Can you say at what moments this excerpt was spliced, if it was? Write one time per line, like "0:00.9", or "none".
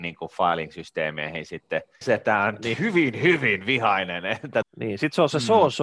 0:02.0
0:04.6